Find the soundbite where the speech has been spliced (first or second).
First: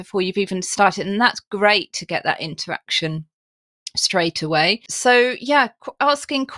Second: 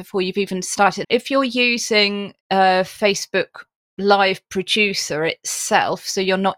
second